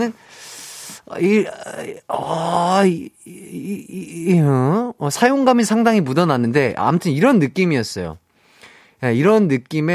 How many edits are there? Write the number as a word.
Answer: zero